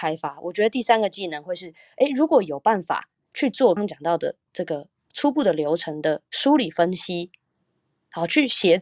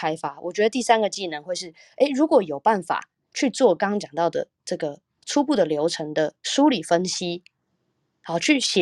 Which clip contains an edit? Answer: first; 1 cut; at 3.8 s

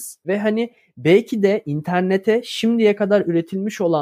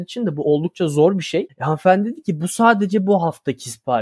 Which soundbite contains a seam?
second; 1 cut; at 1.5 s

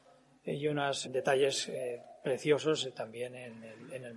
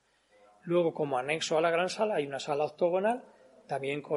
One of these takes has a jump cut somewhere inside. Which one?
first; 1 cut; at 1.0 s

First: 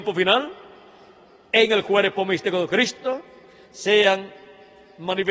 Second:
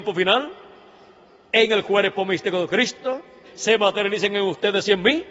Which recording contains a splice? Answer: second; 1 cut; at 3.4 s

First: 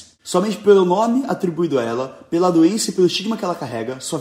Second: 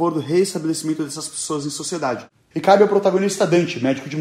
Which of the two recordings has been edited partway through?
second; 1 cut; at 2.5 s

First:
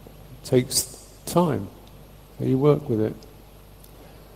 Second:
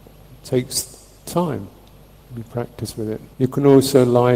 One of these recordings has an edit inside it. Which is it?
second; 2 cuts; at 2.2 s, 3.3 s

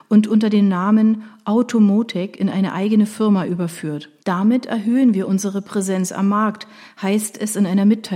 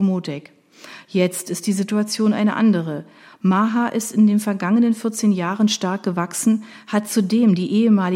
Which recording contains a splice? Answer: first; 1 cut; at 4.2 s

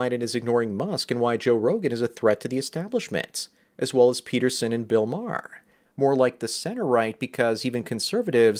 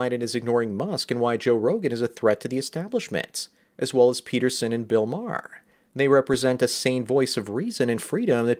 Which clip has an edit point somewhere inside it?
first; 1 cut; at 5.8 s

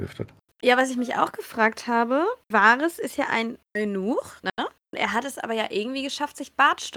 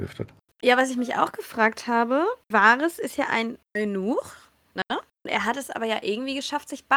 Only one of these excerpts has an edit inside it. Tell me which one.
first; 1 cut; at 4.4 s

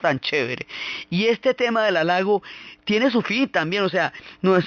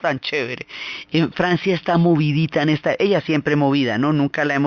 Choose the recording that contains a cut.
second; 1 cut; at 1.0 s

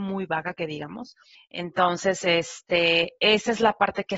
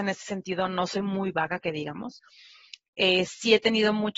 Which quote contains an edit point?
first; 1 cut; at 1.3 s

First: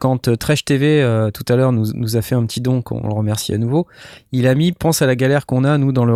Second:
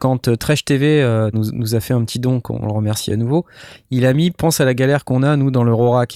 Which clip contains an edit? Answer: second; 1 cut; at 1.3 s

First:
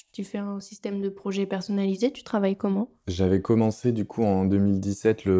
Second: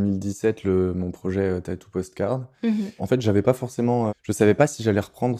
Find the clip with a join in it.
second; 2 cuts; at 3.0 s, 4.1 s

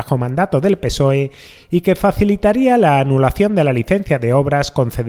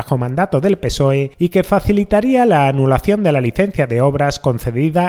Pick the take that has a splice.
second; 1 cut; at 1.3 s

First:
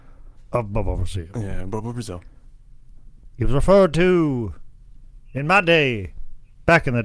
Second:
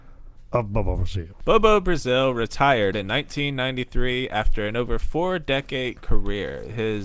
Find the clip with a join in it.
second; 1 cut; at 1.3 s

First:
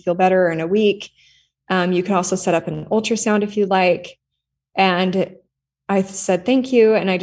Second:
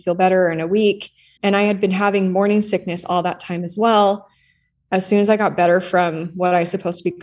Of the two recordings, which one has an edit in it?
second; 1 cut; at 1.4 s

